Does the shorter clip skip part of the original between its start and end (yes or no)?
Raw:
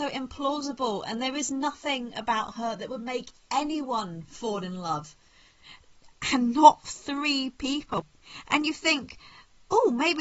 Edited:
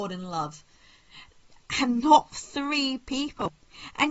no